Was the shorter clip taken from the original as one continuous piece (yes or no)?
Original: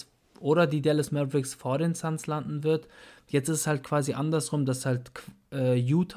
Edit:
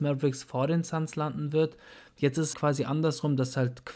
no